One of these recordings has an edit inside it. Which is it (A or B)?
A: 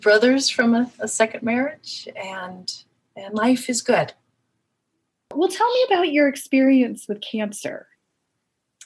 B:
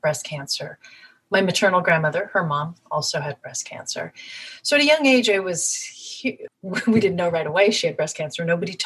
B